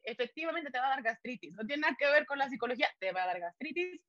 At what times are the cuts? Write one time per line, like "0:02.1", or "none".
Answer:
none